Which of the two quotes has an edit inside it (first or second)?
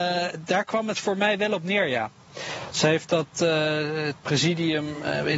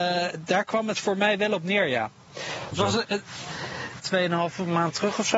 second